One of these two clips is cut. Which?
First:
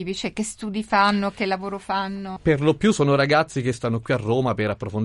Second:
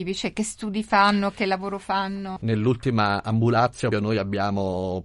second; 2 cuts; at 2.4 s, 3.9 s

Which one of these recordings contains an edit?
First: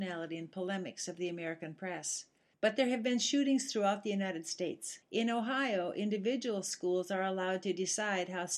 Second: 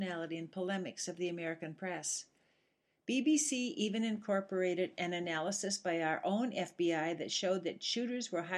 first; 2 cuts; at 2.5 s, 5.0 s

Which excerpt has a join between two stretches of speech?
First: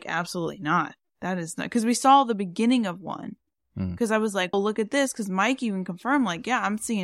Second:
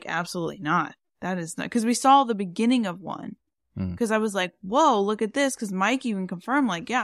first; 1 cut; at 4.5 s

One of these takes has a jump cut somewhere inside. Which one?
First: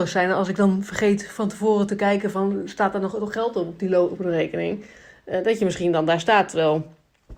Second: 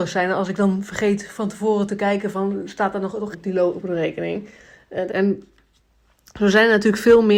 second; 2 cuts; at 3.3 s, 5.1 s

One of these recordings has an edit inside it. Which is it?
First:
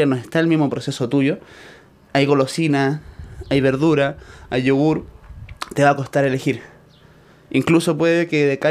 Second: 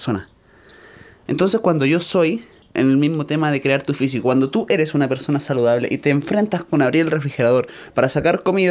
second; 2 cuts; at 1.3 s, 2.6 s

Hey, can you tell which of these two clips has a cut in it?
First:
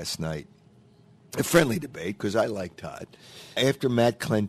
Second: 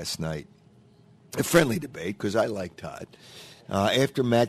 first; 1 cut; at 3.6 s

